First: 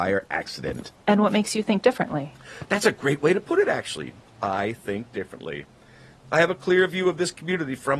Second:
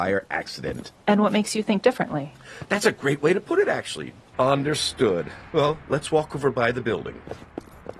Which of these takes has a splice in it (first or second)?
second